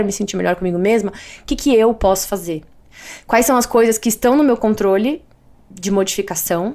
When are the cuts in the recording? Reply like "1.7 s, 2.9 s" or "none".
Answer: none

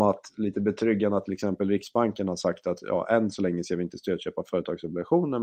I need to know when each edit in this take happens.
none

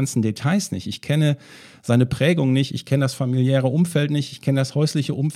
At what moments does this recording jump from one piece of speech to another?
none

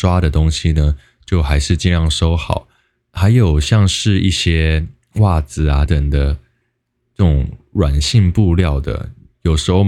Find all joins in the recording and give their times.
5.9 s

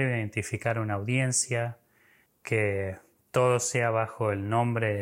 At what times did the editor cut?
2.3 s

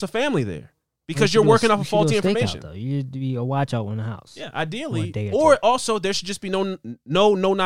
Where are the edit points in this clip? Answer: none

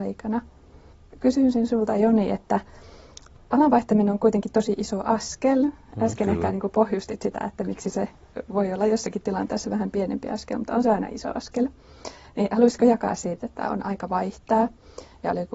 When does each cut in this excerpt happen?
13.4 s

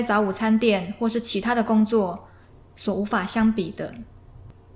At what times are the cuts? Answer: none

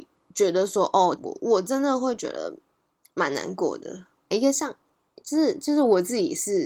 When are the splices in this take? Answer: 1.2 s, 4.3 s

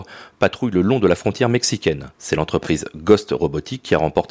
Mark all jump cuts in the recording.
2.1 s

